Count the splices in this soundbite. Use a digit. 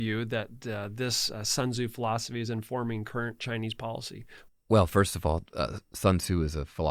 1